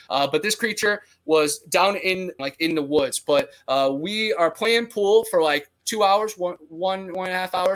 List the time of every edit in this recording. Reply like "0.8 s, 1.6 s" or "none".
2.4 s